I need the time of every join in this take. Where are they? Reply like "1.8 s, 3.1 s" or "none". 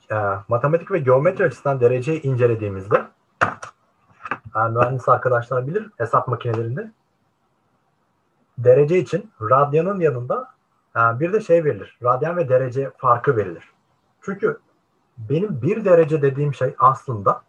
5.9 s